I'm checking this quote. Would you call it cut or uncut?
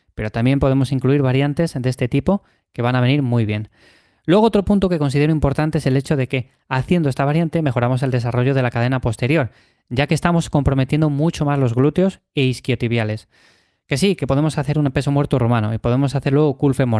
uncut